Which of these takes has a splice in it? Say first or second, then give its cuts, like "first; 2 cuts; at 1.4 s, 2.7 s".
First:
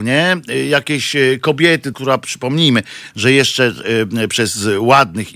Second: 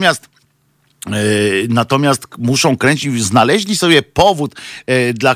first; 1 cut; at 1.9 s